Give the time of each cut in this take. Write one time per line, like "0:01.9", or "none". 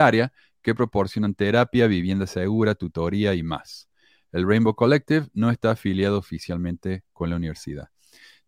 none